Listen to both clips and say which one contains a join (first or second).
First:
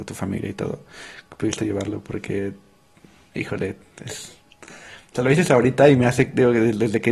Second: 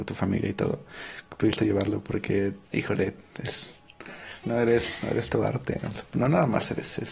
second